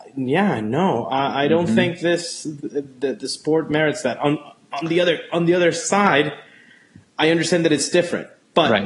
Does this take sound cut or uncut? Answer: uncut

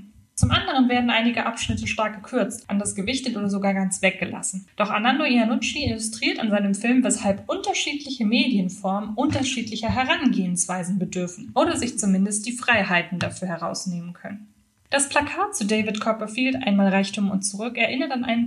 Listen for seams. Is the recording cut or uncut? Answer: uncut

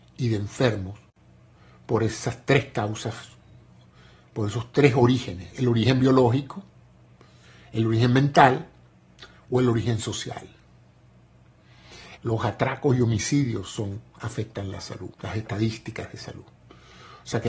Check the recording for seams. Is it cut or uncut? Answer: cut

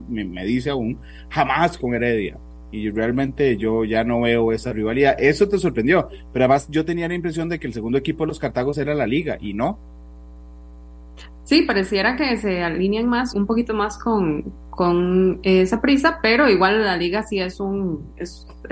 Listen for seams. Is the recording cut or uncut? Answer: cut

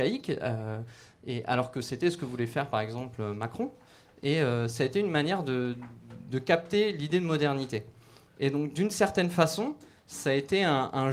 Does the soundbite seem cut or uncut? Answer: uncut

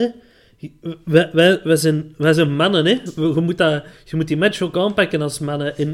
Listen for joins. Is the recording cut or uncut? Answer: uncut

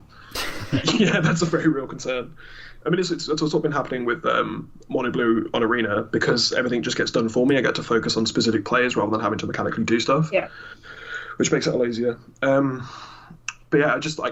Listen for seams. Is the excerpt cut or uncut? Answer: uncut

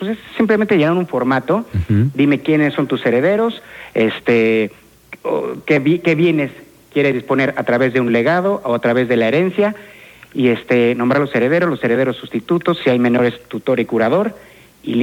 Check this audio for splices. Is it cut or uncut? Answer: uncut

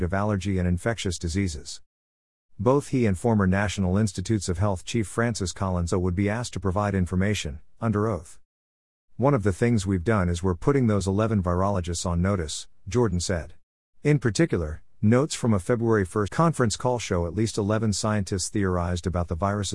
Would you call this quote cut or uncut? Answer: cut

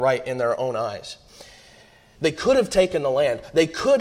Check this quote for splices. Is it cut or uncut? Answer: cut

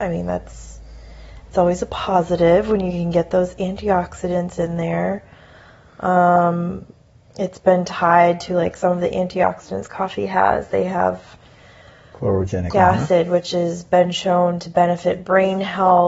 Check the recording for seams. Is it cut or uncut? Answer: cut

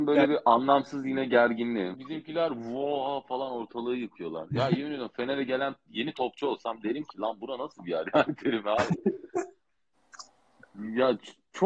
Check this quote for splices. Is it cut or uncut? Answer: cut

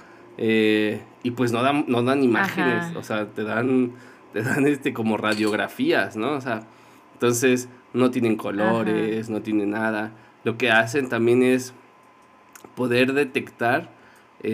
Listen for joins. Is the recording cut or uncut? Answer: uncut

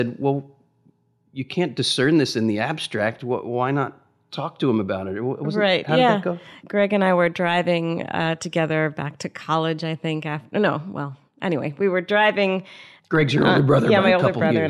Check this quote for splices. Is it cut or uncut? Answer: uncut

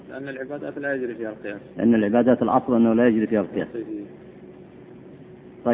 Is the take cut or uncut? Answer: cut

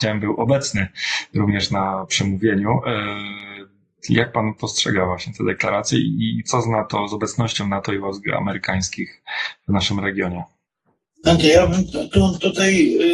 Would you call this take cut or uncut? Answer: uncut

